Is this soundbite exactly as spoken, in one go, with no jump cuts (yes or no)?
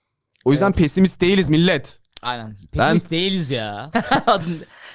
no